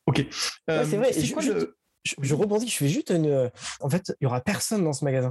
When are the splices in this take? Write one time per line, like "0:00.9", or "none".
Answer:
0:03.8